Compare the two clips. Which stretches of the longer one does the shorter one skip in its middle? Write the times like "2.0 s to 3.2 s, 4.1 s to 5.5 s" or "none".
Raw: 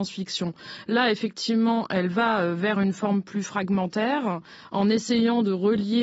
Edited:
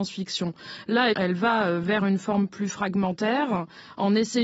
1.1 s to 1.9 s